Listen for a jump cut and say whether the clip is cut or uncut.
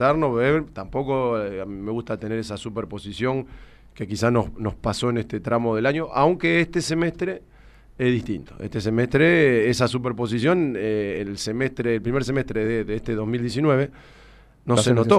uncut